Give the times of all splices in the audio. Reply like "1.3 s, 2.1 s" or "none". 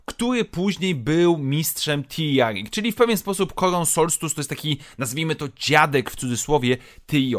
none